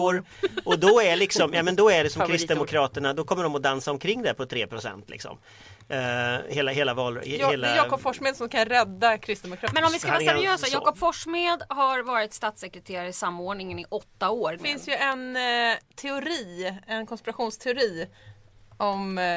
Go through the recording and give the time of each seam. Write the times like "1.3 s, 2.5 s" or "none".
9.7 s, 14.6 s